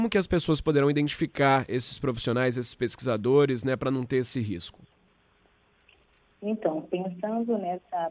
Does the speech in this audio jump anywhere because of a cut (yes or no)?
no